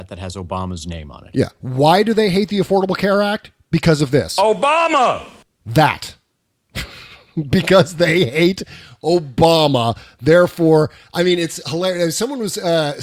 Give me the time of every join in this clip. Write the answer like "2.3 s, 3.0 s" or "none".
none